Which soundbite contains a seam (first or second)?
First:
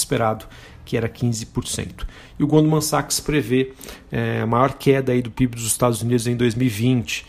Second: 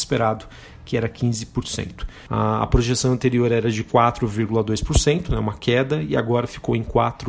second